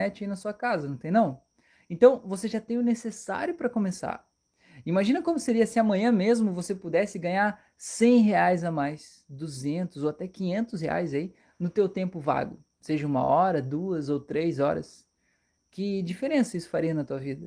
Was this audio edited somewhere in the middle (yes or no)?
no